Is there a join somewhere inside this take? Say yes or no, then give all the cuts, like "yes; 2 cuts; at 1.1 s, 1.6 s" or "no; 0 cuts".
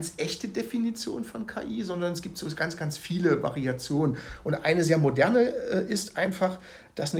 no; 0 cuts